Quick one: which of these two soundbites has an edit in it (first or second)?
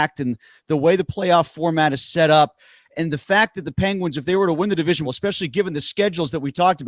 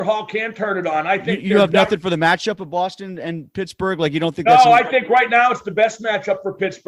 first